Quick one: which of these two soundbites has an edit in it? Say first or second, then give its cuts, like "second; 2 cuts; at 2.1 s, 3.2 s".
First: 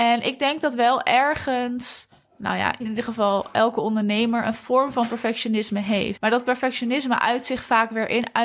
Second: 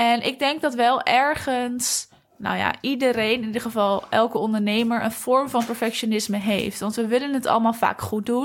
first; 2 cuts; at 2.8 s, 6.2 s